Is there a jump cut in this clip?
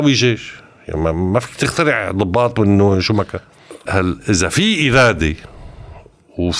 yes; 1 cut; at 3.9 s

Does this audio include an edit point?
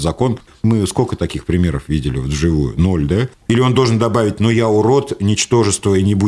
yes; 1 cut; at 3.3 s

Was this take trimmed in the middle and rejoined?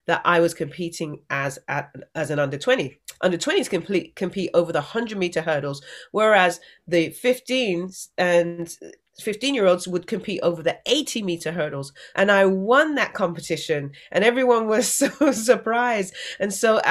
yes; 1 cut; at 12.1 s

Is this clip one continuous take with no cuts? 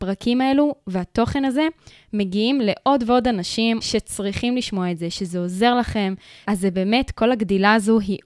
no; 2 cuts; at 3.8 s, 6.4 s

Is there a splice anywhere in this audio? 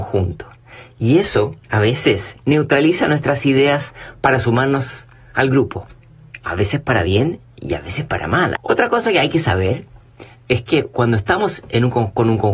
yes; 2 cuts; at 1.6 s, 8.6 s

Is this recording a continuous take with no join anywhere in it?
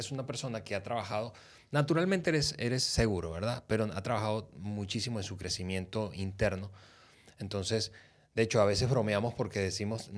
yes; 0 cuts

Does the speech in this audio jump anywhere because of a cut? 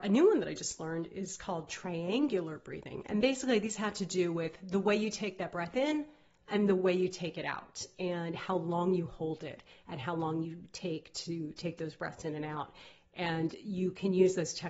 no; 0 cuts

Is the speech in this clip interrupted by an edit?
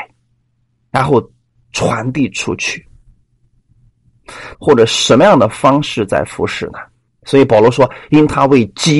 yes; 2 cuts; at 4.5 s, 7.1 s

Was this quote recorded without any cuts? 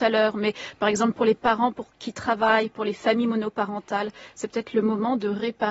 yes; 0 cuts

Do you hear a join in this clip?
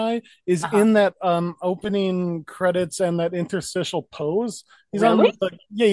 no; 0 cuts

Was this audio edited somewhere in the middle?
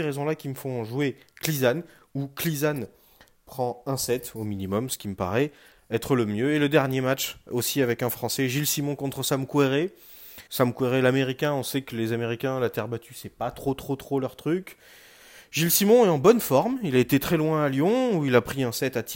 yes; 1 cut; at 10.5 s

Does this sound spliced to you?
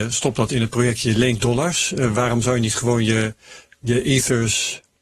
no; 0 cuts

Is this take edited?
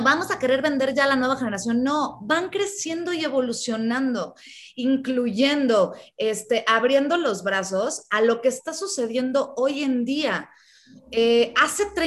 no; 0 cuts

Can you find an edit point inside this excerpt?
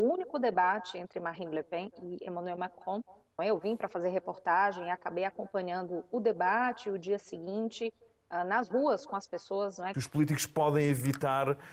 yes; 2 cuts; at 3.4 s, 9.9 s

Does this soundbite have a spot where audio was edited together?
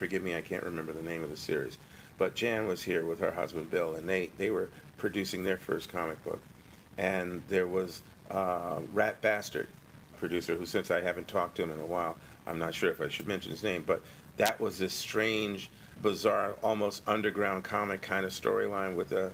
yes; 2 cuts; at 10.1 s, 16.0 s

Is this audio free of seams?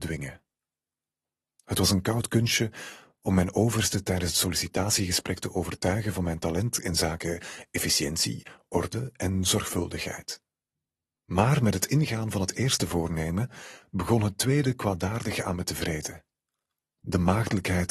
no; 1 cut; at 16.8 s

